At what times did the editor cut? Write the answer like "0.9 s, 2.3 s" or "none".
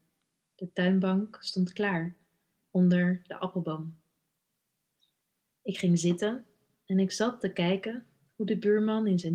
none